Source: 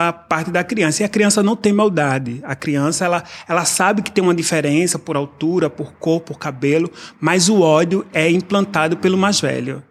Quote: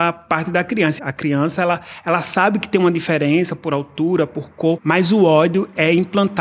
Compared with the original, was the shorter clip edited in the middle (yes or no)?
yes